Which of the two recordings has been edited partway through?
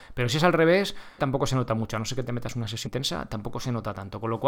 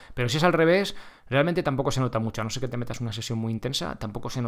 first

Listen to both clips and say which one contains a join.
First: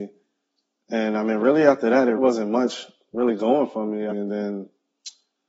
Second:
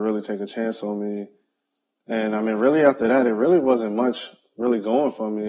first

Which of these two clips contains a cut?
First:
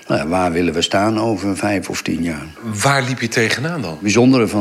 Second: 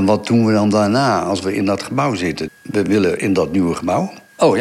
second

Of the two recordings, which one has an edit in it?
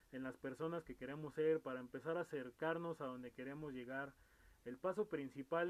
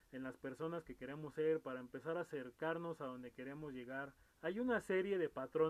second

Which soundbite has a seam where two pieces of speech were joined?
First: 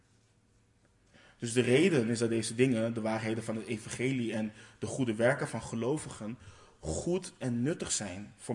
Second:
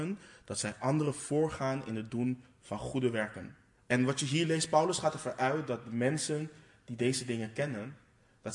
second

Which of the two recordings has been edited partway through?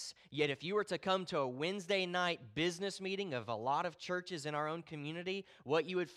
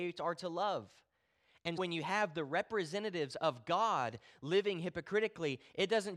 second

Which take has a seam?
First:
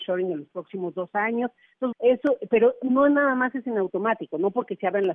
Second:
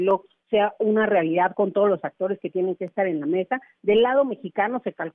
first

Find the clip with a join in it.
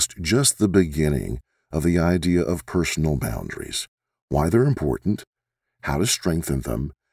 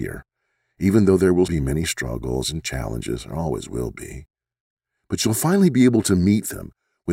second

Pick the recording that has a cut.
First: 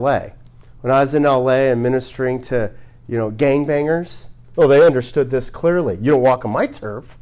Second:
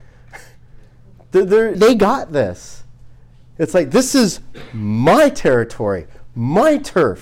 second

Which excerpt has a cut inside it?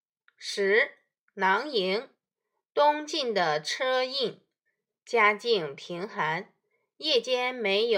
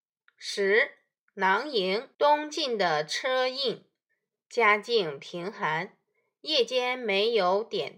second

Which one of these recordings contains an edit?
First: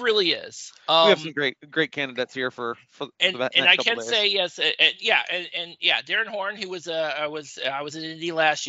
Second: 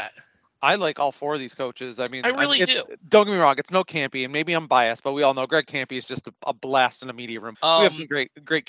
second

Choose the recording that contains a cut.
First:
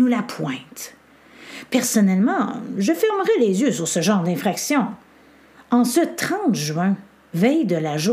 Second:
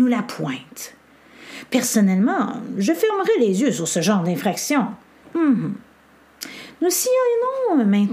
second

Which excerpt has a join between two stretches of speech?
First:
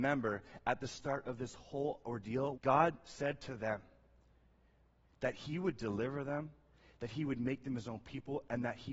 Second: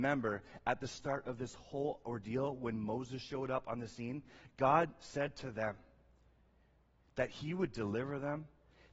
first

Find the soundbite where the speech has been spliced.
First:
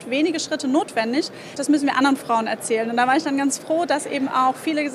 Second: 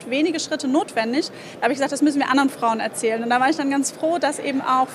first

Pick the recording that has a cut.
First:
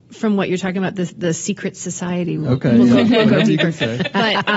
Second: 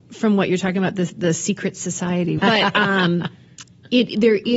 second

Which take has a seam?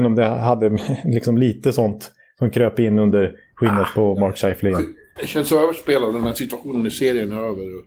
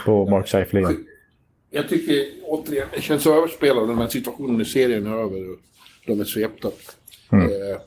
first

